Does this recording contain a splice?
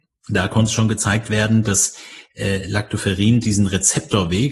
no; 0 cuts

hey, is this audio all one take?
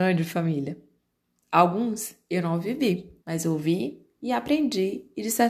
no; 2 cuts; at 1.4 s, 3.2 s

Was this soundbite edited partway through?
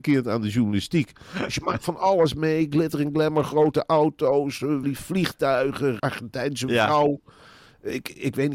yes; 2 cuts; at 4.8 s, 6.0 s

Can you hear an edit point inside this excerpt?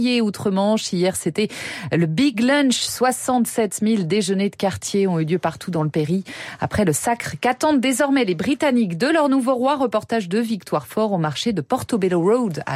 no; 0 cuts

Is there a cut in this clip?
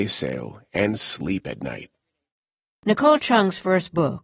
no; 0 cuts

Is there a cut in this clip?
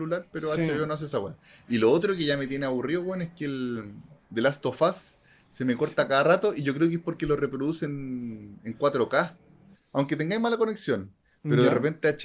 yes; 1 cut; at 9.7 s

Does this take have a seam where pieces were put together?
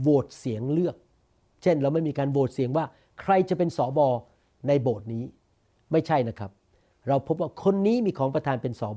no; 0 cuts

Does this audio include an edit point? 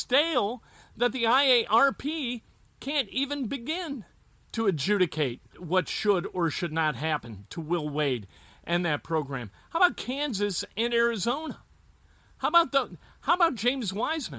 yes; 1 cut; at 5.5 s

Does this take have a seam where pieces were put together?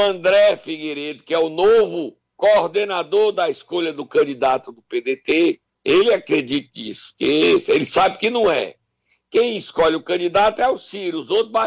no; 0 cuts

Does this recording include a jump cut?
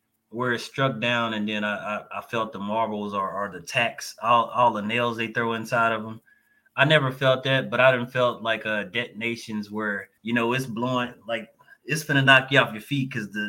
yes; 1 cut; at 10.2 s

